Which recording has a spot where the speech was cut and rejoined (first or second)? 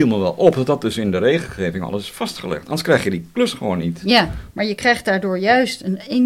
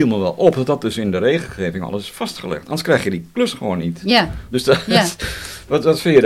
first